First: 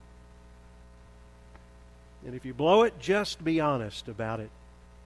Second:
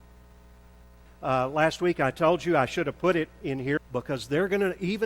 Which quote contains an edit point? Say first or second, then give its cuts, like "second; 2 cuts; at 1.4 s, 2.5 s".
second; 2 cuts; at 1.1 s, 3.8 s